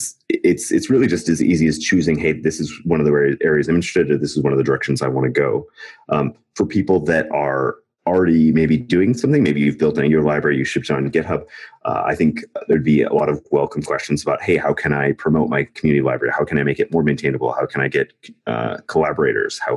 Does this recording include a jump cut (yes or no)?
no